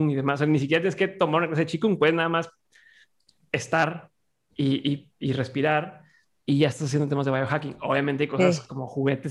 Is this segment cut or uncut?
uncut